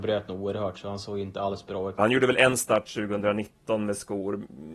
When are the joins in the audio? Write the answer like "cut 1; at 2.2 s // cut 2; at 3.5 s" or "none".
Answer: cut 1; at 2.0 s